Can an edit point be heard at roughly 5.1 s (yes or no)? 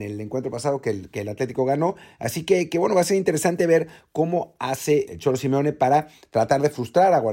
yes